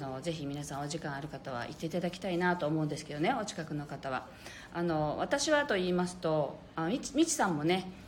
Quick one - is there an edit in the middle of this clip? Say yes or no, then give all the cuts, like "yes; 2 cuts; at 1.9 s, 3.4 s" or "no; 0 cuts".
no; 0 cuts